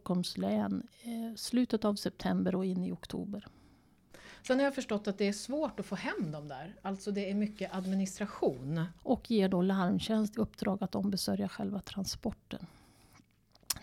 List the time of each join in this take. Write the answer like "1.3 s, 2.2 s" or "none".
9.0 s, 10.3 s